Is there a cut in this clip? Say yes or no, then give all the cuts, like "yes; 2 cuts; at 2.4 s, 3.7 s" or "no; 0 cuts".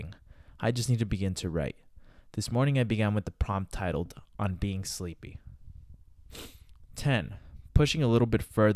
no; 0 cuts